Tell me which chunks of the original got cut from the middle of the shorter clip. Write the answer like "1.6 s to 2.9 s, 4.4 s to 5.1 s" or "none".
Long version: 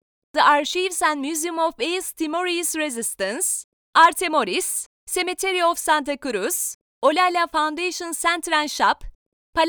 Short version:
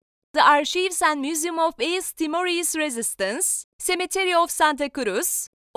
3.7 s to 5.0 s